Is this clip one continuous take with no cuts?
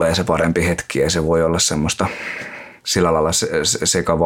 yes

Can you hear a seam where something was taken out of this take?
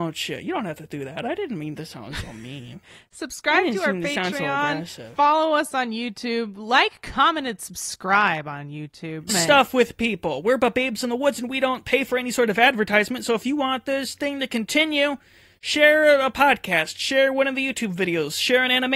yes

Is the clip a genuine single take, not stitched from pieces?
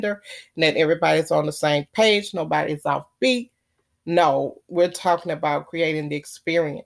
no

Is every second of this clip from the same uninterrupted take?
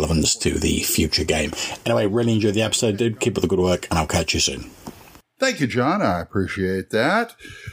yes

